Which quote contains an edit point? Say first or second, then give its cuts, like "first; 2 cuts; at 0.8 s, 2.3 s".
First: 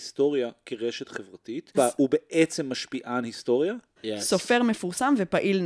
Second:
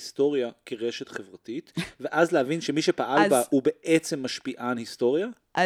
first; 2 cuts; at 1.7 s, 4.0 s